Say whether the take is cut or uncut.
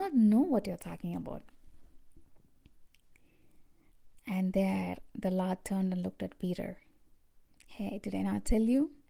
cut